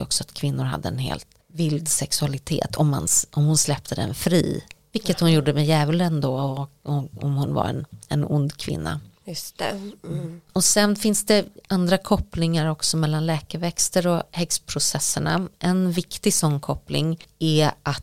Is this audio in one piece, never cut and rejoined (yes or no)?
yes